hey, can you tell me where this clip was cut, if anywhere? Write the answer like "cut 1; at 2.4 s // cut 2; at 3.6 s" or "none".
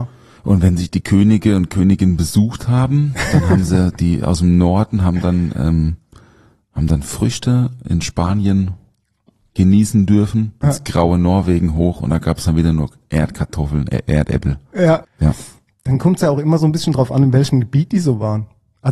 cut 1; at 10.6 s // cut 2; at 15.0 s

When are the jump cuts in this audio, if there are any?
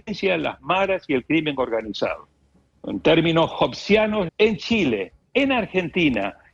cut 1; at 4.3 s

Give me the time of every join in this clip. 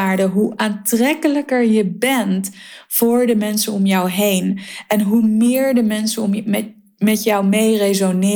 none

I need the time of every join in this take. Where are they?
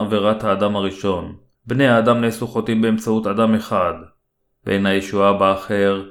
cut 1; at 1.6 s // cut 2; at 4.5 s

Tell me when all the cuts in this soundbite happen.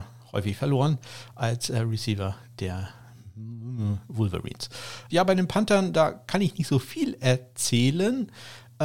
cut 1; at 5.1 s

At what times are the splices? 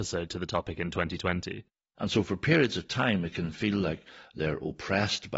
cut 1; at 1.9 s

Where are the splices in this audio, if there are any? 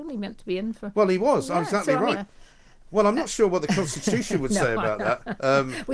cut 1; at 2.1 s

